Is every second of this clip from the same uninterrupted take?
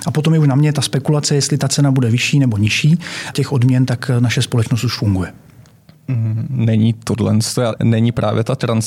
no; 2 cuts; at 3.3 s, 7.8 s

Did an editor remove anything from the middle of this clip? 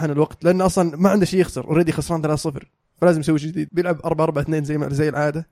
yes; 1 cut; at 3.7 s

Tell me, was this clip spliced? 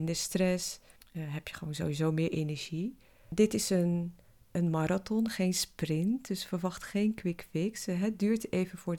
yes; 1 cut; at 1.0 s

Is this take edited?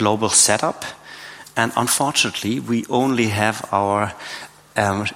no; 0 cuts

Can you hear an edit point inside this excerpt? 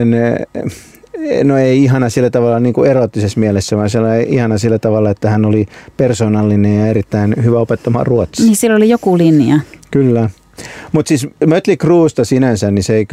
no; 0 cuts

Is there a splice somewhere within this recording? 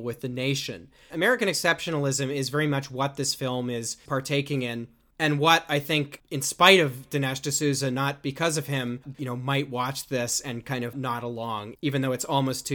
yes; 3 cuts; at 1.1 s, 9.1 s, 10.9 s

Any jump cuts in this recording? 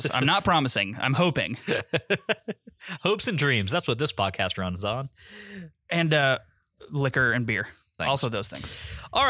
yes; 1 cut; at 8.0 s

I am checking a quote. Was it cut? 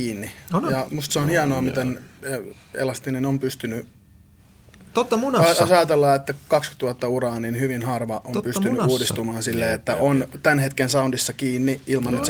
no; 0 cuts

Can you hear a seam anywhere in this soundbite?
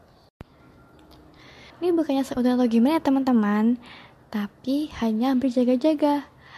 yes; 1 cut; at 1.7 s

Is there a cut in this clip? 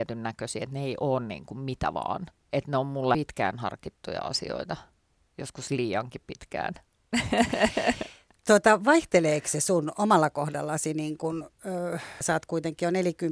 yes; 1 cut; at 12.2 s

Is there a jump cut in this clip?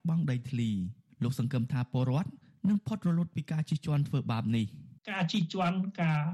yes; 1 cut; at 5.0 s

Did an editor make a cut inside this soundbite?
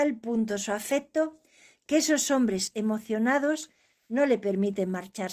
no; 0 cuts

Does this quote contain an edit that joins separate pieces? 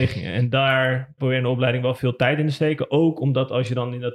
yes; 1 cut; at 1.2 s

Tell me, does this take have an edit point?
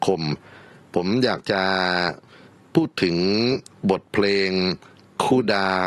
no; 0 cuts

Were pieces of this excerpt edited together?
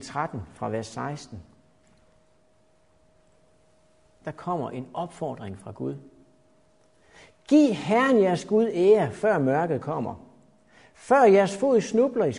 no; 0 cuts

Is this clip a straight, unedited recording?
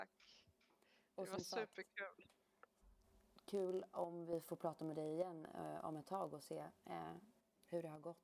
yes; 0 cuts

